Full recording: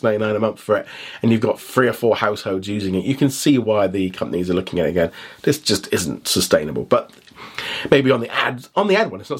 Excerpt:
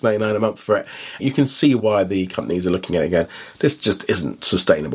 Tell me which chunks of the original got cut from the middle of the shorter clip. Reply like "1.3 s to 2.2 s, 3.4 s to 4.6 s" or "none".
1.2 s to 3.0 s